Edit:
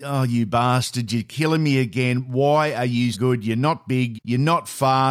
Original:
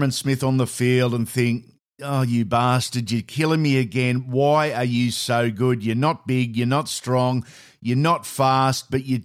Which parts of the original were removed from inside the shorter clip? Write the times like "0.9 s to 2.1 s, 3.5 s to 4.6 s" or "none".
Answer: 5.1 s to 5.5 s, 6.5 s to 7.7 s